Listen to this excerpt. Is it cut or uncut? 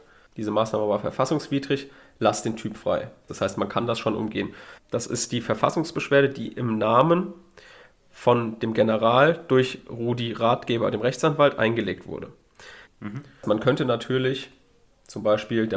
cut